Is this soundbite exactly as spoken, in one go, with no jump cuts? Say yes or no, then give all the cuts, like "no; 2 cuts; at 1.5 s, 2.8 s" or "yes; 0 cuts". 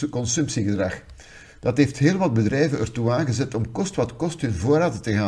no; 1 cut; at 1.6 s